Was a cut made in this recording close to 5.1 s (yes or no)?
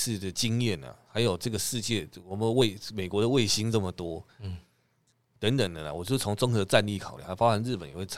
no